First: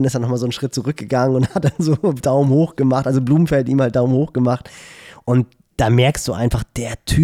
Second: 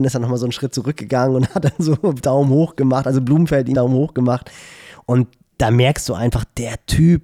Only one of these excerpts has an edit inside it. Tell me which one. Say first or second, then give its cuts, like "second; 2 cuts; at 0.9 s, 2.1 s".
second; 1 cut; at 3.7 s